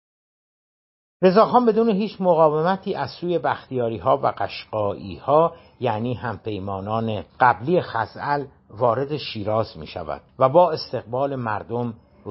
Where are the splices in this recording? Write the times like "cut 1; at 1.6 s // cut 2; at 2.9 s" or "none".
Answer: cut 1; at 7.3 s // cut 2; at 10.3 s